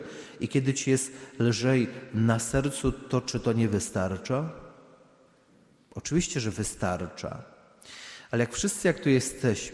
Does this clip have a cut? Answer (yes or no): no